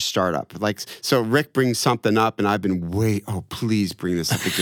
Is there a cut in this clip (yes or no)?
no